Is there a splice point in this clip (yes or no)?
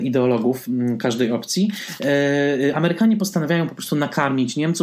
no